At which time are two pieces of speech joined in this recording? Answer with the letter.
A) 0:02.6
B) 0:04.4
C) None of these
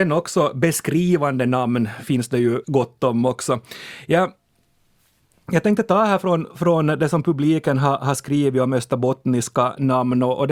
A